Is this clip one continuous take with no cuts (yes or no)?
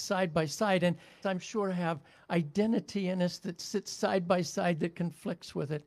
no